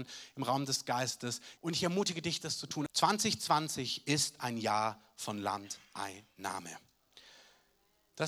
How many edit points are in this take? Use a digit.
2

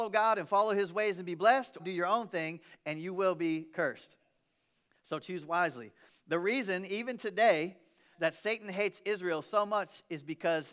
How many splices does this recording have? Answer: 3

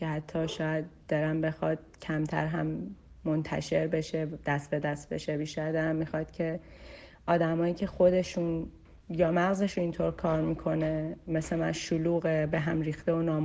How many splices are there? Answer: 1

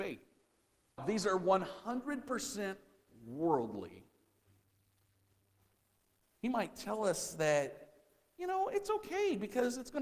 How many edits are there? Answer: 2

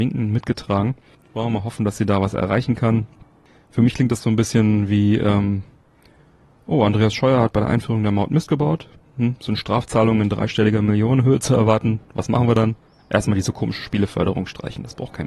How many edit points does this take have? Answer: 0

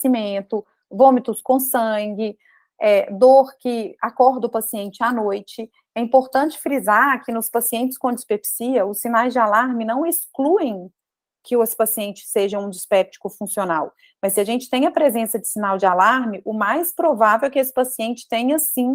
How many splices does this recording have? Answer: 0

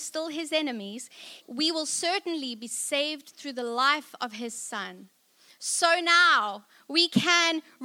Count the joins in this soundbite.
1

